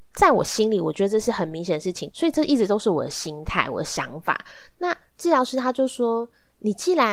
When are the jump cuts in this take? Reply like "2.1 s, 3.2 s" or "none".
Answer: 2.1 s